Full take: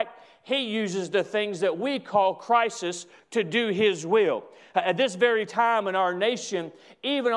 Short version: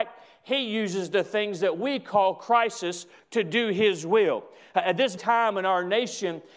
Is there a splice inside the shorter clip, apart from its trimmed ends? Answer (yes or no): yes